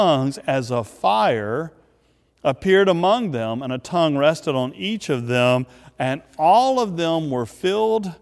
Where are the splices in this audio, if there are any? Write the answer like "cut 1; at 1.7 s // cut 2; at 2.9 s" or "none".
none